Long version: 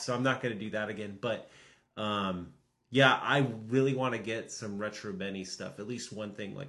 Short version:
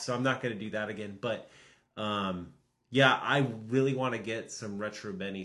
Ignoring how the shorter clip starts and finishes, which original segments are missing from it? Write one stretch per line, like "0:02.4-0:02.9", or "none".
none